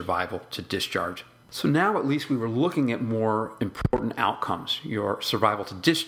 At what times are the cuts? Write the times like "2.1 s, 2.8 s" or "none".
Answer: 1.4 s